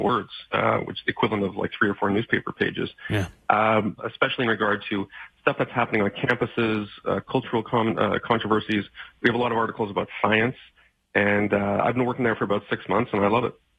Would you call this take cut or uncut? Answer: cut